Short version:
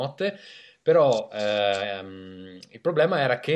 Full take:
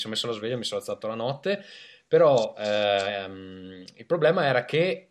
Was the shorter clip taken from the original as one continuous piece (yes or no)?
yes